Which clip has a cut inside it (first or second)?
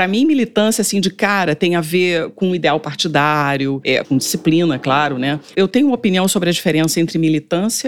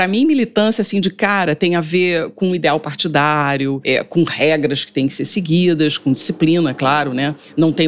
first